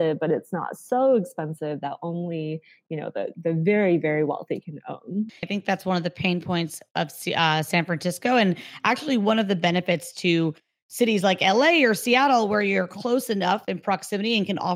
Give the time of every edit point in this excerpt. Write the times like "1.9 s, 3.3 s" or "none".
5.4 s